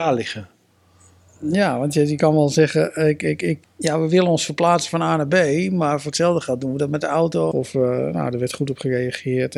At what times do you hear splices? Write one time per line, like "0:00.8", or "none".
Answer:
0:03.6
0:07.5

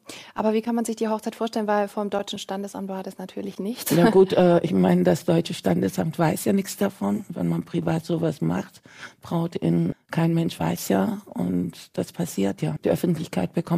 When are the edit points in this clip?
0:09.9
0:12.8

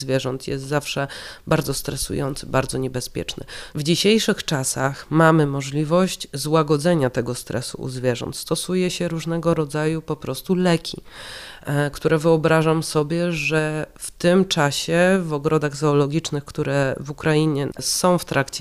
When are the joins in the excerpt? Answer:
0:03.7

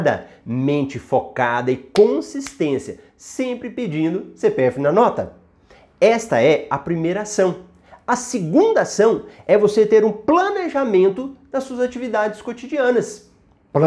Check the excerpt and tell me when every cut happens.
none

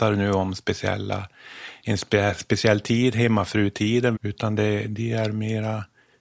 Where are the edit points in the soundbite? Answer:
0:04.2

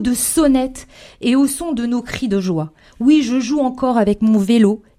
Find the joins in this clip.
none

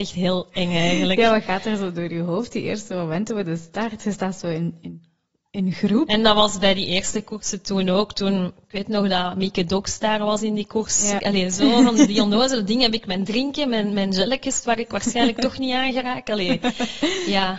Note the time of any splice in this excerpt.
0:06.1
0:11.2

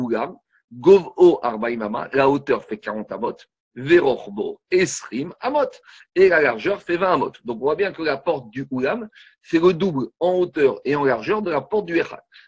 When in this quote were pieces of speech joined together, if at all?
none

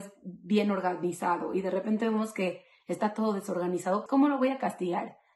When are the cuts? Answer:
0:04.1

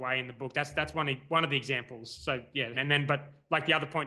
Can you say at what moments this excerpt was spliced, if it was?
0:02.7

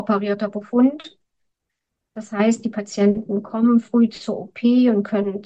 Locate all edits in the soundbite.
none

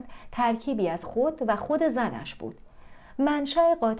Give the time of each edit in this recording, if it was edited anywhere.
0:01.0

